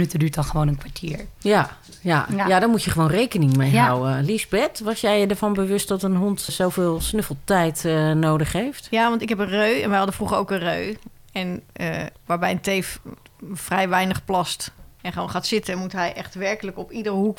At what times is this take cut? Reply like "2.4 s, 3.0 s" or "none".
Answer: 6.5 s